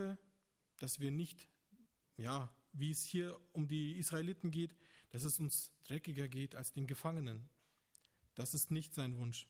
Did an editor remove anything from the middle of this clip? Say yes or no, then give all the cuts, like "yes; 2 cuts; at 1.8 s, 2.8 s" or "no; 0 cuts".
no; 0 cuts